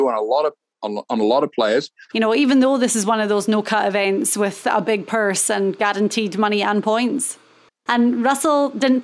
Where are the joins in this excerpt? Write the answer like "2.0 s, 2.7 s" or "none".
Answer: 2.1 s, 7.9 s